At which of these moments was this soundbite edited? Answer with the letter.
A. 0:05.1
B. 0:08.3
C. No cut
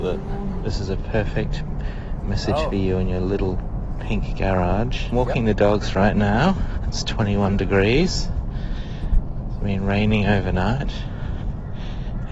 A